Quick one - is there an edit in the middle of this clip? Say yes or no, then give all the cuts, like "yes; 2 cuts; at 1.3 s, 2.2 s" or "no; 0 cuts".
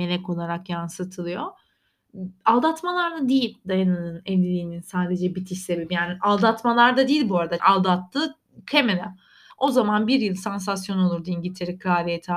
yes; 2 cuts; at 7.6 s, 9.5 s